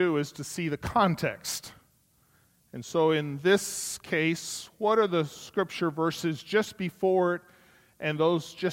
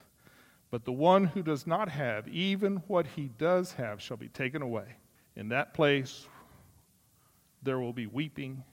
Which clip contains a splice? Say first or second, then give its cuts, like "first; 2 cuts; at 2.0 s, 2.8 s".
second; 1 cut; at 5.2 s